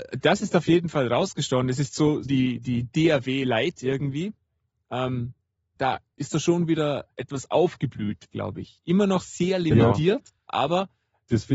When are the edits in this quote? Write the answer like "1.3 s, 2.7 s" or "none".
2.3 s, 5.8 s, 8.3 s